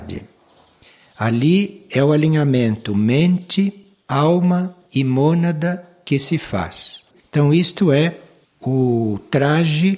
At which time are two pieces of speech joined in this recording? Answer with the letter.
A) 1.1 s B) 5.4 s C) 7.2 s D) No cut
C